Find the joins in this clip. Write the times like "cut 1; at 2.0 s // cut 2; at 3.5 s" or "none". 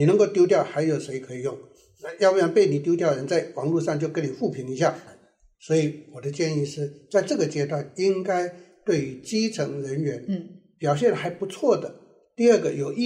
cut 1; at 5.1 s

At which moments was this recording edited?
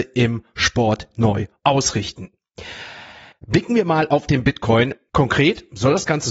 cut 1; at 3.3 s // cut 2; at 5.1 s

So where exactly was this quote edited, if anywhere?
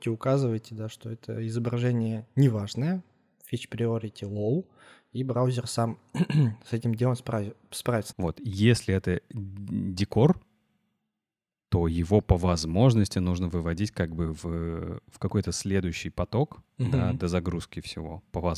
cut 1; at 8.1 s

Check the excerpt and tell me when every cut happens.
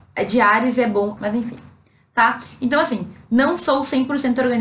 cut 1; at 1.2 s

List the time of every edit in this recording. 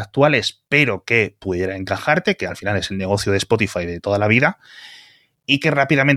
none

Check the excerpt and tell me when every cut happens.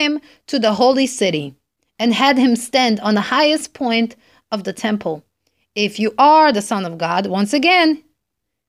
none

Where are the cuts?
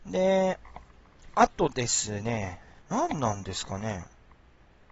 none

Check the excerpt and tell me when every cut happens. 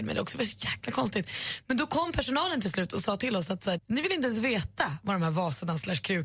cut 1; at 3.8 s

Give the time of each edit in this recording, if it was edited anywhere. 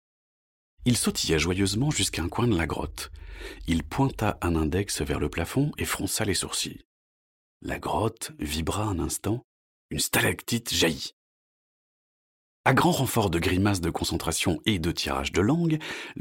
none

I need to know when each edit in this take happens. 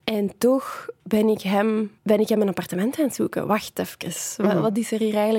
cut 1; at 2.0 s

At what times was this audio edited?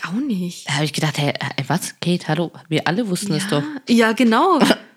none

